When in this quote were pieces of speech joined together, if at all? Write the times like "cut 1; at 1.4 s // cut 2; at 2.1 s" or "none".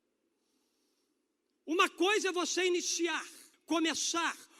cut 1; at 3.5 s